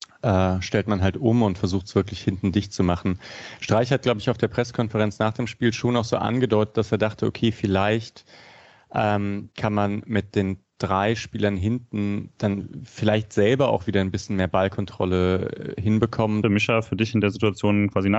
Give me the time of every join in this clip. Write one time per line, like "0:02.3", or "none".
0:16.4